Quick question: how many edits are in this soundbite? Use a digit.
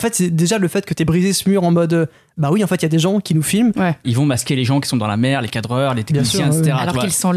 1